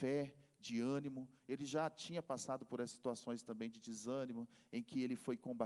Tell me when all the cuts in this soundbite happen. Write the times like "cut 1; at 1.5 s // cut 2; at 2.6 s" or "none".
none